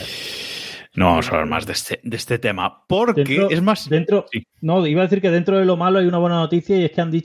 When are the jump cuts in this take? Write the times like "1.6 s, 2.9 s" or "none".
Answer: none